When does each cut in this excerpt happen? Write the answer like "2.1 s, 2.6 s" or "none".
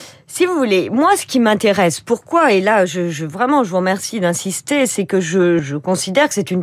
5.6 s